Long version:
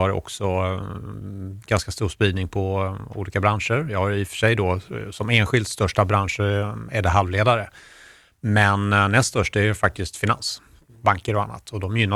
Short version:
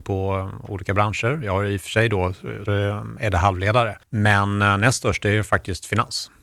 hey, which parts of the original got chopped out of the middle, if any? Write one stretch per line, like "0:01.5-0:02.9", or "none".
0:05.1-0:06.4
0:07.7-0:08.3